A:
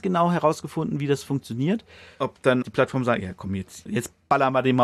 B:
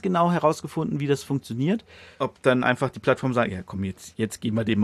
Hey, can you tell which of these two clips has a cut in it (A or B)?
A